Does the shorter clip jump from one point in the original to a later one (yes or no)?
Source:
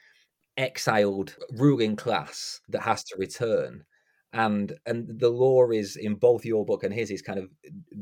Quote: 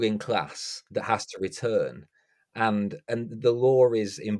no